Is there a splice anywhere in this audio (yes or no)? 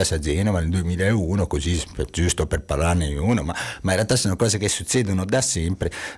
no